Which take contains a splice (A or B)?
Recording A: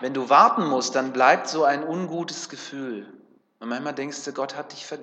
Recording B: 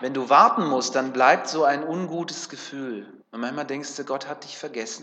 B